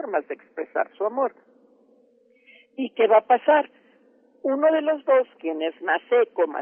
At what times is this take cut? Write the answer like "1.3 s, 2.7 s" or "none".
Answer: none